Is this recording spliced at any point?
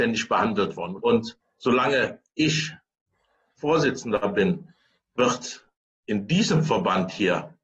yes; 1 cut; at 1.0 s

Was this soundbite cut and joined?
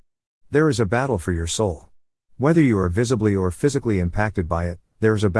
yes; 1 cut; at 2.3 s

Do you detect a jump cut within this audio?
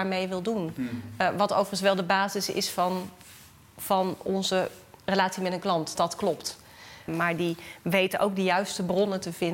yes; 2 cuts; at 6.0 s, 7.1 s

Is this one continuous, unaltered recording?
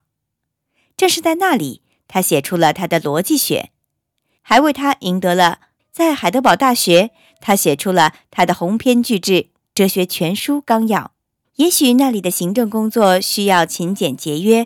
no; 3 cuts; at 4.4 s, 5.8 s, 11.4 s

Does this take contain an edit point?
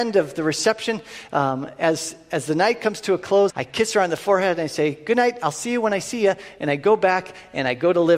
yes; 1 cut; at 3.5 s

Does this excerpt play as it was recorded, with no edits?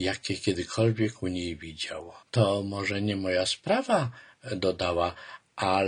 no; 1 cut; at 2.2 s

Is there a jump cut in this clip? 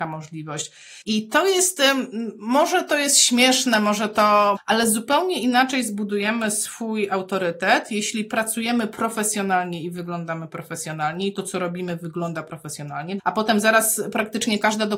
yes; 3 cuts; at 1.0 s, 4.6 s, 13.2 s

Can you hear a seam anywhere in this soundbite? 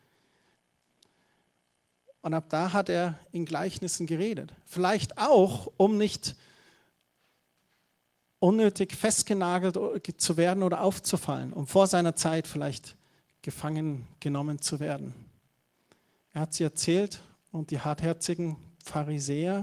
no; 0 cuts

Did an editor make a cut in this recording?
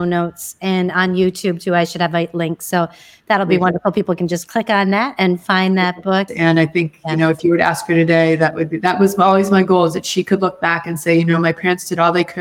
yes; 1 cut; at 6.3 s

